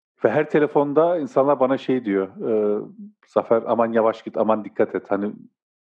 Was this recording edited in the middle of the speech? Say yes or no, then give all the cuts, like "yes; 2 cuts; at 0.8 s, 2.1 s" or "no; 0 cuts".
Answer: no; 0 cuts